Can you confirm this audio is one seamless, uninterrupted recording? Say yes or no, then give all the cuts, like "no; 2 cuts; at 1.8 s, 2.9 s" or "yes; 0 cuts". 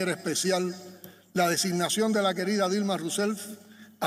yes; 0 cuts